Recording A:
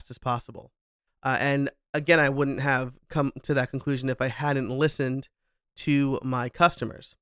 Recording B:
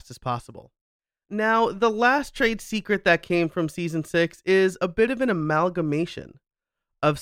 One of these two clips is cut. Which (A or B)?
A